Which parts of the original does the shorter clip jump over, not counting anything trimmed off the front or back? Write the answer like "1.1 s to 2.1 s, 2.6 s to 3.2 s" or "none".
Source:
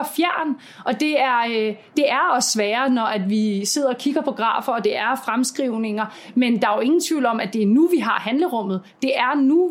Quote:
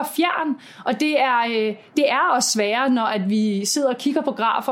none